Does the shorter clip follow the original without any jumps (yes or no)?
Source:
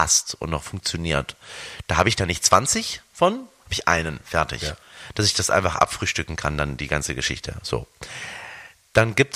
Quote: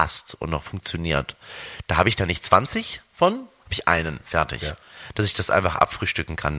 yes